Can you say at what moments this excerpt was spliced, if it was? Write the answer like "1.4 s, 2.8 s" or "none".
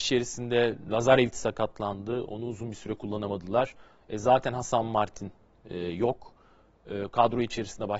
none

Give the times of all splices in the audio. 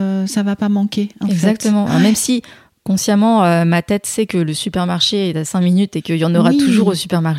none

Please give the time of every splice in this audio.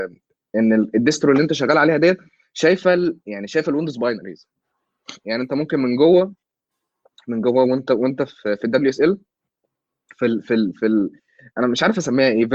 none

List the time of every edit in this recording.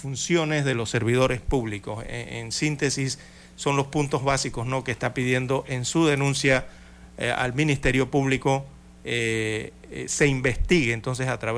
none

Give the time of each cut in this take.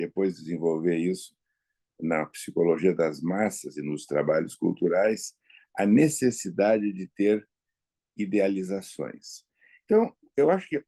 none

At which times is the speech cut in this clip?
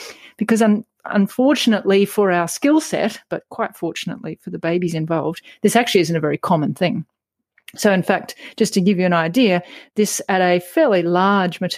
none

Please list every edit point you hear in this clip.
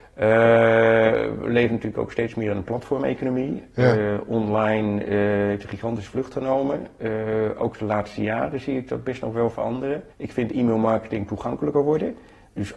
10.1 s

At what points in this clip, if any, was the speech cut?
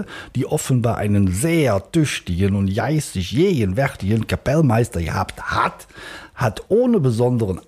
none

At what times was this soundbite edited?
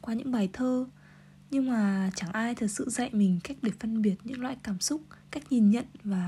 5.2 s

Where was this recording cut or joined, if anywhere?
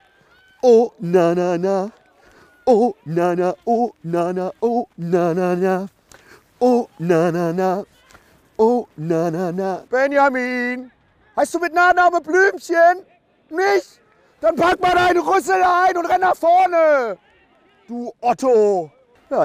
none

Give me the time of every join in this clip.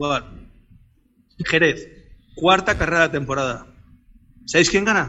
1.4 s

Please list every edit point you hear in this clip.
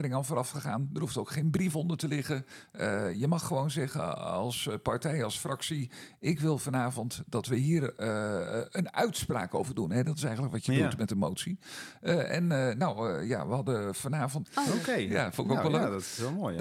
14.4 s

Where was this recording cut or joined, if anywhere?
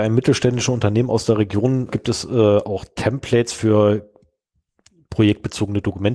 1.9 s

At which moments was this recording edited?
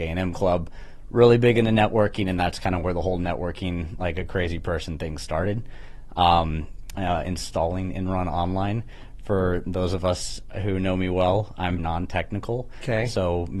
6.9 s, 11.8 s

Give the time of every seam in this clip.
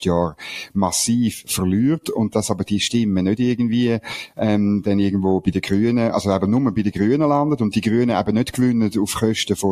none

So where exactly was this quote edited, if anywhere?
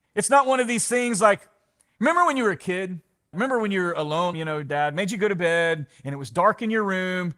3.3 s, 4.3 s

